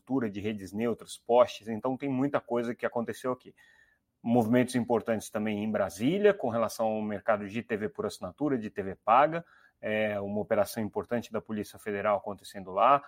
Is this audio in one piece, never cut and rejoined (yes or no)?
yes